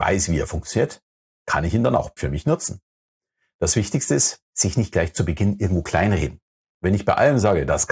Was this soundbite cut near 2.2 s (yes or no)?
yes